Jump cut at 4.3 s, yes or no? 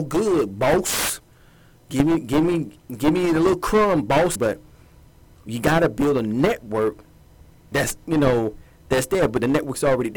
yes